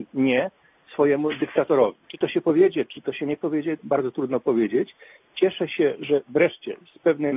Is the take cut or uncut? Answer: cut